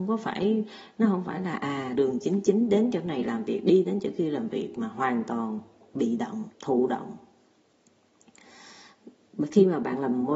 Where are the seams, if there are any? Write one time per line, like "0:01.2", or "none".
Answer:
0:01.9
0:06.5